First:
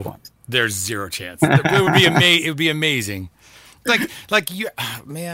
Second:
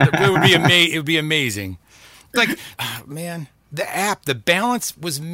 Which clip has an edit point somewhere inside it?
second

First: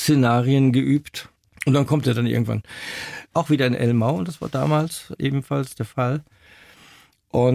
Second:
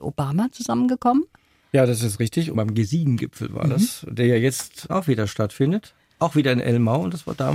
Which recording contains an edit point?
first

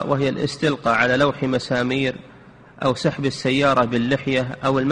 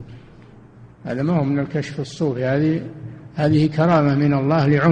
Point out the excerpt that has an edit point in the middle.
second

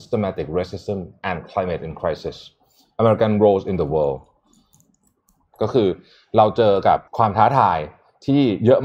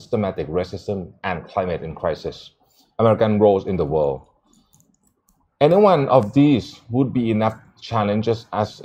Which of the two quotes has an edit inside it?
first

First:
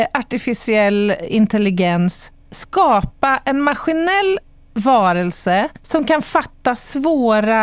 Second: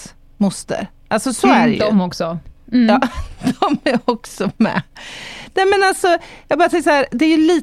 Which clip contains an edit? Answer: first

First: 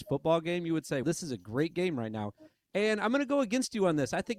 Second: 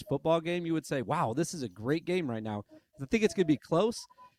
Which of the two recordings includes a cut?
first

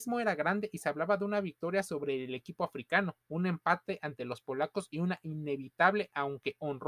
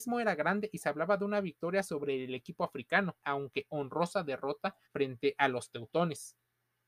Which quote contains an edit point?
second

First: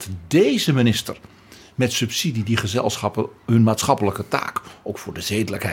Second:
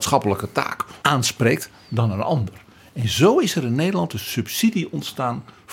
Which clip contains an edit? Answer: second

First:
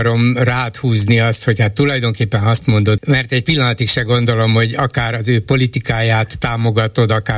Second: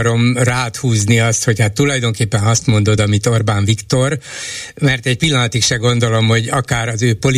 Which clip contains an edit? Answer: first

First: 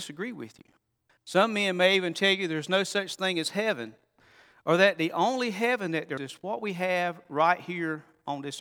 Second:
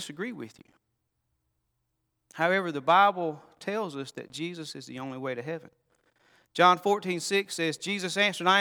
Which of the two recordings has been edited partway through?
first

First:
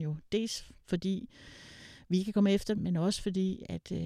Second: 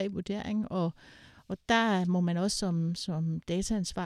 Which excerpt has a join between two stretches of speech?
first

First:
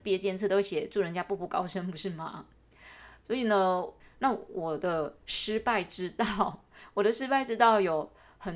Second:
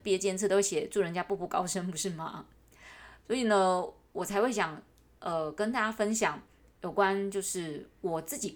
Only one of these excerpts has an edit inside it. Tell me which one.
first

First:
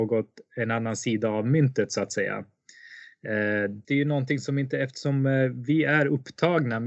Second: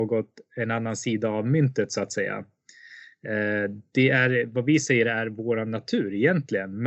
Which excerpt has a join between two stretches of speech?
first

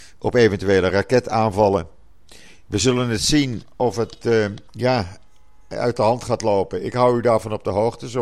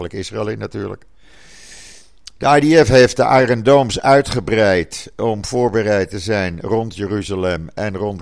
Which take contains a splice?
first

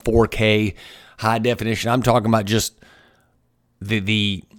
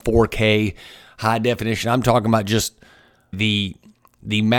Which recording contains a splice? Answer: second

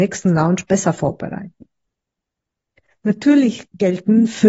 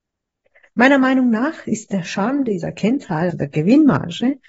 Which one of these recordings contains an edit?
second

